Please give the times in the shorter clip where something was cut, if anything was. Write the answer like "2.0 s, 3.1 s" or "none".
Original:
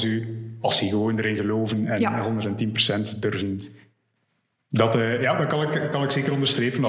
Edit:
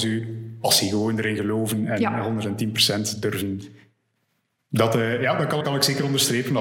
5.6 s